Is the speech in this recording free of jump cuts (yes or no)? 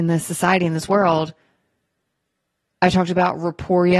no